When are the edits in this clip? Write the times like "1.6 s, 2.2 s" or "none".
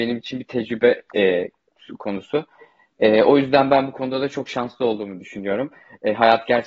none